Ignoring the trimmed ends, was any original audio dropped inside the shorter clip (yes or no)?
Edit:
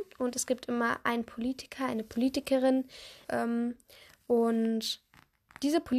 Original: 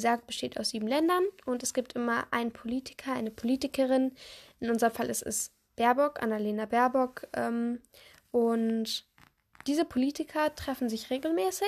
yes